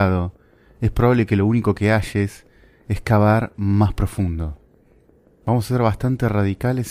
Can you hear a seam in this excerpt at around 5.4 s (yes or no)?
yes